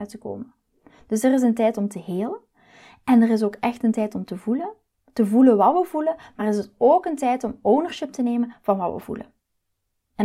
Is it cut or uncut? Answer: uncut